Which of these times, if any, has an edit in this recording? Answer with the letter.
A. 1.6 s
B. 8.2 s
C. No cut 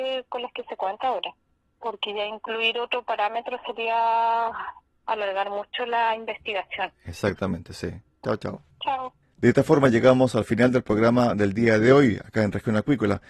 B